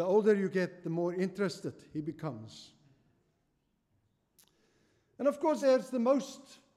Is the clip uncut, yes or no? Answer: no